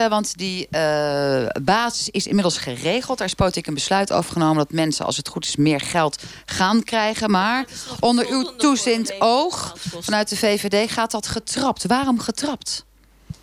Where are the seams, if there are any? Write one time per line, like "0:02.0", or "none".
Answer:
none